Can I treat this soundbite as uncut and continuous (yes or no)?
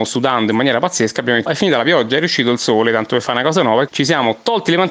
no